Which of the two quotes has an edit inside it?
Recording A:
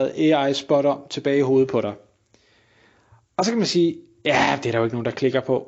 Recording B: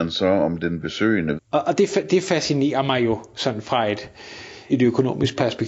B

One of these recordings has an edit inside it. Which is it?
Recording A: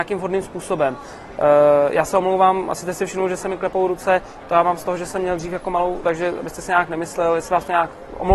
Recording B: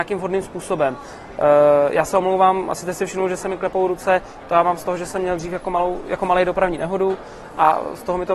A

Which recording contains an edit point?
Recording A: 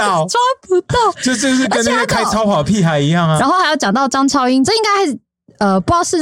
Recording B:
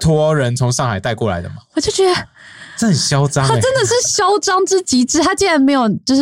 A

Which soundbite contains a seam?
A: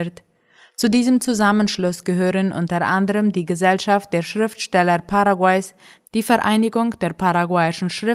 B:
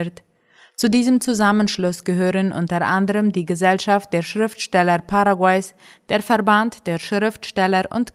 B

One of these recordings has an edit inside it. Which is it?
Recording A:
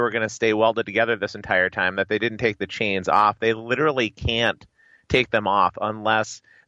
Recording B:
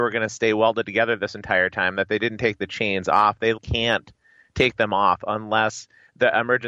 B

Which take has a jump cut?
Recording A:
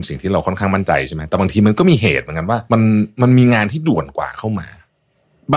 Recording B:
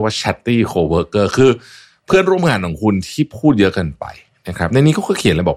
A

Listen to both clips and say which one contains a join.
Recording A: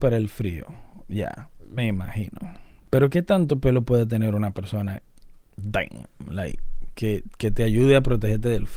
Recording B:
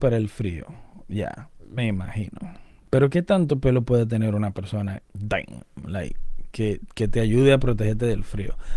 B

